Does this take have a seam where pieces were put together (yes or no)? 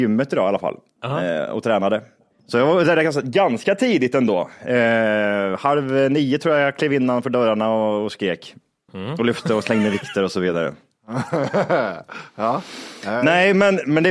yes